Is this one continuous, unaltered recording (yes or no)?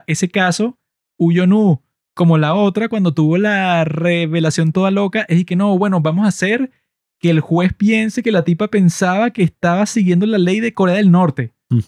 yes